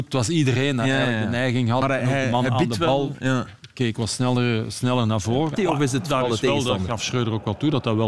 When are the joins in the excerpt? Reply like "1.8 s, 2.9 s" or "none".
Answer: 5.6 s

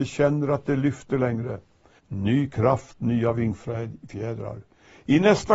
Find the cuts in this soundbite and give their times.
2.0 s

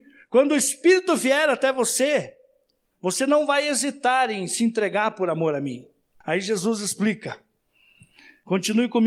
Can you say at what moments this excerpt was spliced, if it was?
6.2 s

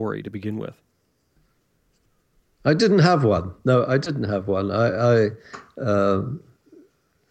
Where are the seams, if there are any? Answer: none

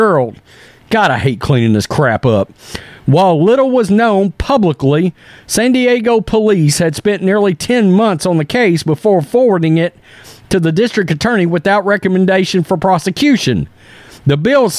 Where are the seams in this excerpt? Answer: none

